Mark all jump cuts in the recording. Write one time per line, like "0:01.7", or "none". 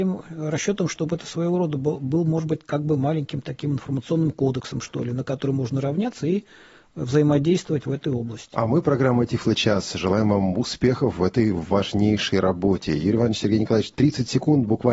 none